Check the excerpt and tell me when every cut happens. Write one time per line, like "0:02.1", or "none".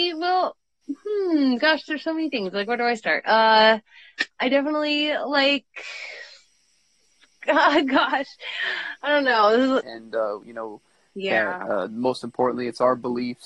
0:09.8